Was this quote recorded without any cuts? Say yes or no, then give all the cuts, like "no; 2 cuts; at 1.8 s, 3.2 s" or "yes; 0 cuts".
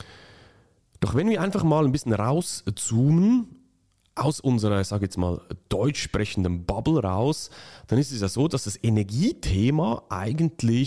yes; 0 cuts